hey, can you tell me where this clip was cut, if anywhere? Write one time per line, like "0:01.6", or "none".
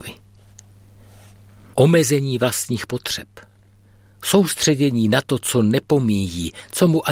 0:01.7